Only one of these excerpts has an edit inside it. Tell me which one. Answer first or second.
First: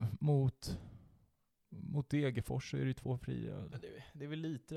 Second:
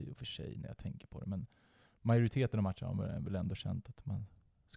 first